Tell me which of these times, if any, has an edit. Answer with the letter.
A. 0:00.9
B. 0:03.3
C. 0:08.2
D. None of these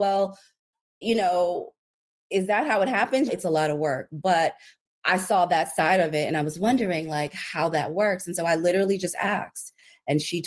B